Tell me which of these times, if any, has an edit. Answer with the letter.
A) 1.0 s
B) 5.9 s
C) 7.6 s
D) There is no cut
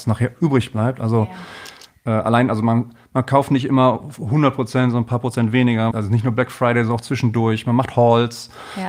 B